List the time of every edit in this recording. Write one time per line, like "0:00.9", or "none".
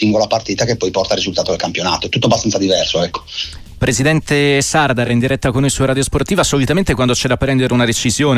none